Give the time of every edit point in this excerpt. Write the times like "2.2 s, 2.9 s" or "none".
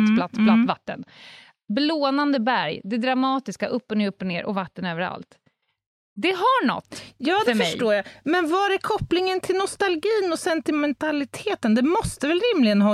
none